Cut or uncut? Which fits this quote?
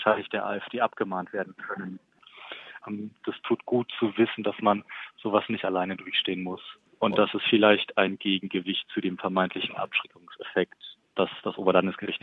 cut